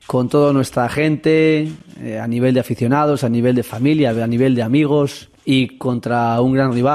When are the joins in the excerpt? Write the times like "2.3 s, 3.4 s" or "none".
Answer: 5.4 s